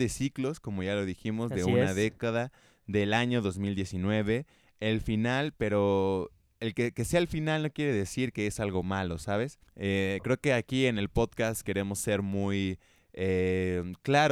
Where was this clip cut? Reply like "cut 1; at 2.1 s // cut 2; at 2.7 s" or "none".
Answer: cut 1; at 9.7 s